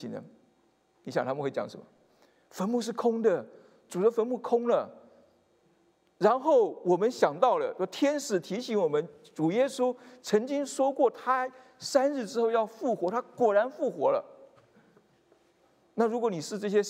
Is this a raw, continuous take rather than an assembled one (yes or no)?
yes